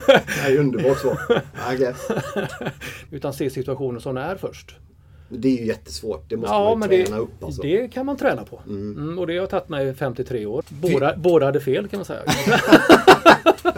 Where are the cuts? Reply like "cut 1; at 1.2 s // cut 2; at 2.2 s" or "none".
cut 1; at 3.1 s // cut 2; at 10.6 s